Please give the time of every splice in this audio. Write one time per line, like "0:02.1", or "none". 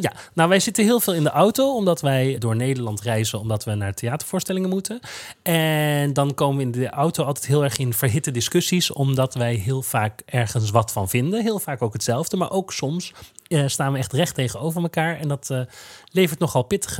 0:02.4